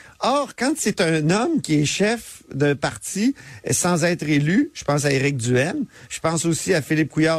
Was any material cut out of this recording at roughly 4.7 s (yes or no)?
no